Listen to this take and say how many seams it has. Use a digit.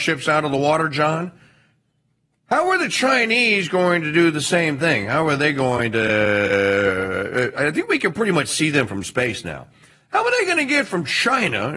0